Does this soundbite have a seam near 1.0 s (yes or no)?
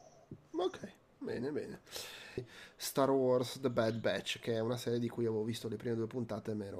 no